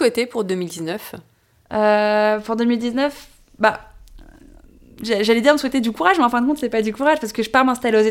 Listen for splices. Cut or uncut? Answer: uncut